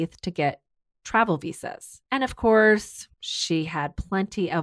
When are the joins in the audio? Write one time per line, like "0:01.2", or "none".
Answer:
0:02.1
0:03.1